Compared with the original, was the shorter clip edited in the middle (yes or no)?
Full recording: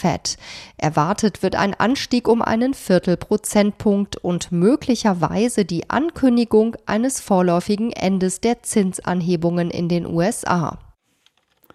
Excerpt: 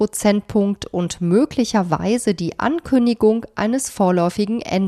no